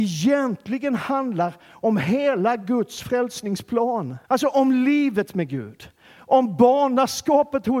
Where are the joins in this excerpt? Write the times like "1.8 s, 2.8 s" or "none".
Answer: 4.2 s